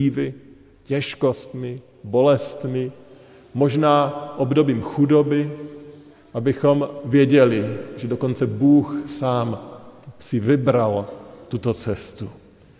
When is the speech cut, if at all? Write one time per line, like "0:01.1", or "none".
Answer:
none